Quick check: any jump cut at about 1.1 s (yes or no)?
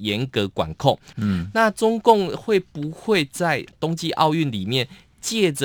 yes